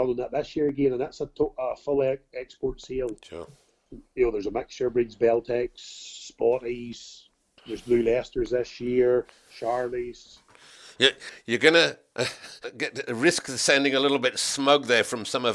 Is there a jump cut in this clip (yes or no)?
no